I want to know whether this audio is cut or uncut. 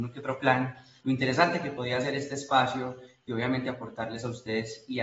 cut